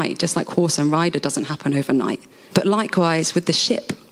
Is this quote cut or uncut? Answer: cut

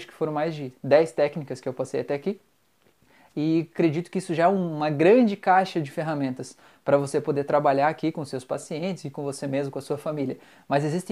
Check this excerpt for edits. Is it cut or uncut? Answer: uncut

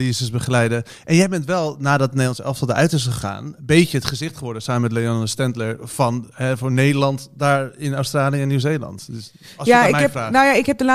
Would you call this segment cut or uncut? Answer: uncut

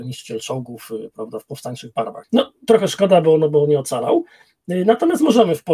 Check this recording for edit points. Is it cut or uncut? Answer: cut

